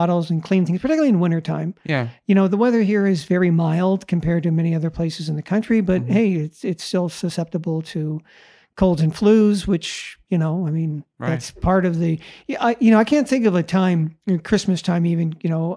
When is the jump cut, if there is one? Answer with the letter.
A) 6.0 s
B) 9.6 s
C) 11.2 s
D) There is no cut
D